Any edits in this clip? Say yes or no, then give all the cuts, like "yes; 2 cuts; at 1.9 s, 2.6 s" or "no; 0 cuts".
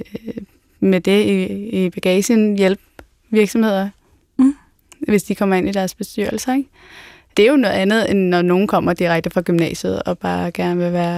no; 0 cuts